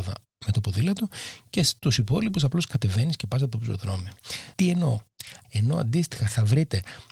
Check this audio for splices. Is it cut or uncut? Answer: cut